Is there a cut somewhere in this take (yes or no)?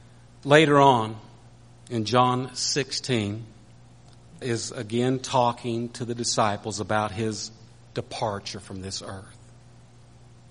yes